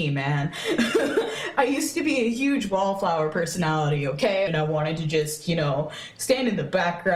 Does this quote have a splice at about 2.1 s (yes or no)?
no